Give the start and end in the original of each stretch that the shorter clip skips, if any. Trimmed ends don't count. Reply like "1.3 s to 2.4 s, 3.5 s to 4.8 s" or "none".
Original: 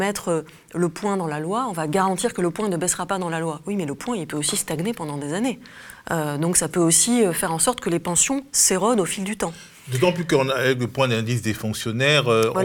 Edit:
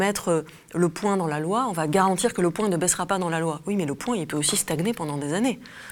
none